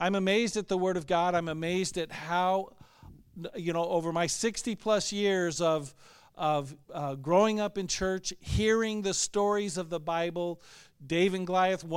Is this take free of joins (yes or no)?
no